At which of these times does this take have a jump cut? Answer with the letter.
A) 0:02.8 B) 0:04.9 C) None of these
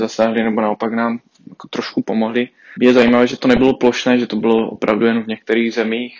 A